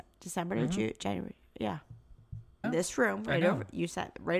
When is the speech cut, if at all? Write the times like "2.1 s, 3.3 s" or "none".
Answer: 2.6 s